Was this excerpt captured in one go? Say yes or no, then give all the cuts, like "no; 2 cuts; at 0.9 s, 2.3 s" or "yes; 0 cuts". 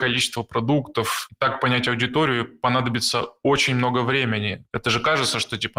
yes; 0 cuts